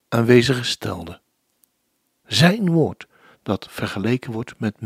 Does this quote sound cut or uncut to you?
cut